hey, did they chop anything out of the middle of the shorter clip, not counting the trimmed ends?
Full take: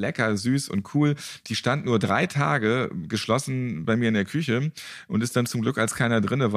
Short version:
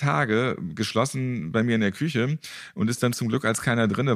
no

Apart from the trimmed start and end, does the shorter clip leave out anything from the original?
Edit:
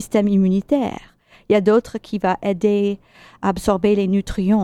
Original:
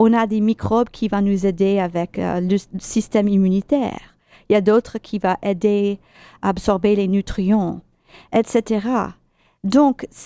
no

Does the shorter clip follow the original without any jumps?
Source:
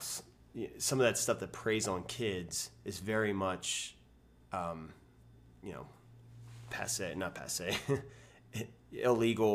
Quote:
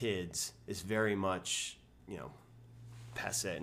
no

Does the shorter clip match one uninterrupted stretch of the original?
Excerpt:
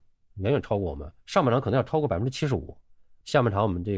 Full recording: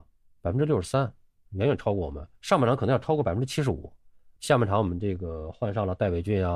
yes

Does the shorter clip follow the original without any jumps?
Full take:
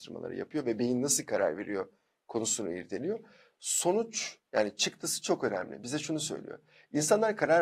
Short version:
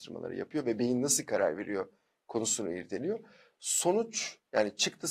yes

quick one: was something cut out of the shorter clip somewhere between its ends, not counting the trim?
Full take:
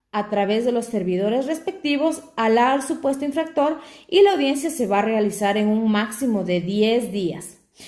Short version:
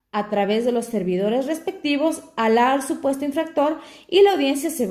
no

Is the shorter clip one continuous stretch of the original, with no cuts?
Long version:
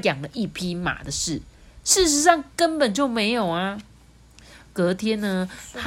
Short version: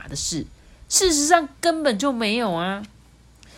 yes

